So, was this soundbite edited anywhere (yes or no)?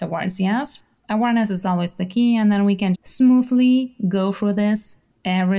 yes